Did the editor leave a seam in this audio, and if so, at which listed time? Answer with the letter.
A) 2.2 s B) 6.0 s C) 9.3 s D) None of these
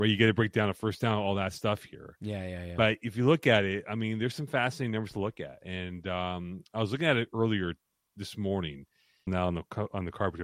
C